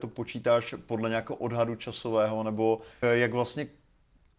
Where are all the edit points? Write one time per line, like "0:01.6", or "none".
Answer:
0:03.0